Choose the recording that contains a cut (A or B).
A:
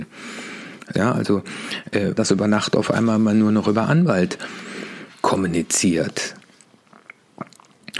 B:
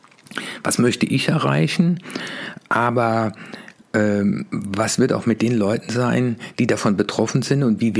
A